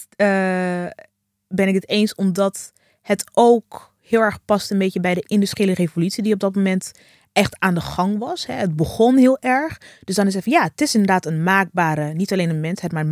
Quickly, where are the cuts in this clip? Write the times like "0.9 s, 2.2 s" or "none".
none